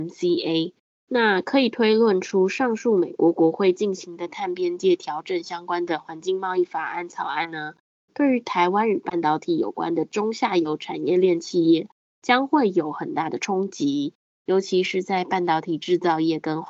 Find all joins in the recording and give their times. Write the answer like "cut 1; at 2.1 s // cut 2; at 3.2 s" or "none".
cut 1; at 1.0 s